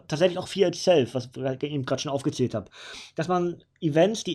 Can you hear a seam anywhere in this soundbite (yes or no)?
no